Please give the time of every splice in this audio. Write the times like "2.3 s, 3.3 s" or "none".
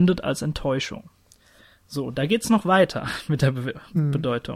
none